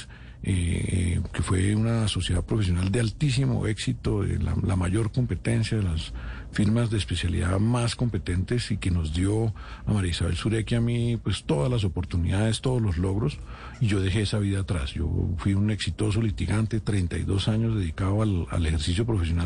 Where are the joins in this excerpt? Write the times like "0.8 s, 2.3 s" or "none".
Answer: none